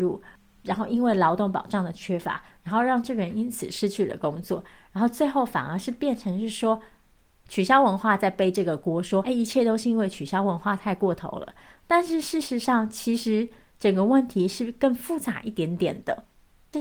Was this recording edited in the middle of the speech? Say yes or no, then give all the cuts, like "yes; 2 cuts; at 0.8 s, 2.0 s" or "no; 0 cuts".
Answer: yes; 1 cut; at 9.2 s